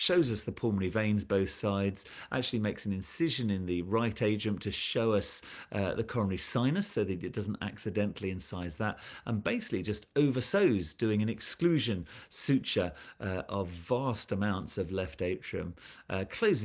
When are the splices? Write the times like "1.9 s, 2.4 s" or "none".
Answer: none